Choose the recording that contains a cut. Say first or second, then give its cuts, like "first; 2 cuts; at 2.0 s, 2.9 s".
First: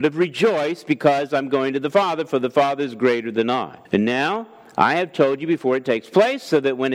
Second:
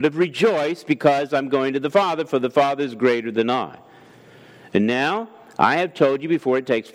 first; 1 cut; at 3.9 s